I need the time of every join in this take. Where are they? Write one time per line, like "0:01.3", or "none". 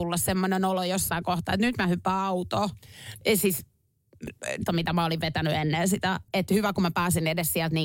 0:03.2
0:04.7
0:06.3